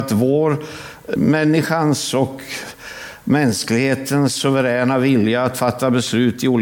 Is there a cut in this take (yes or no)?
yes